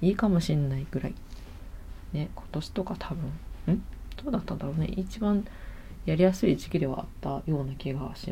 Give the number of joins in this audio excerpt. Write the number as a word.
zero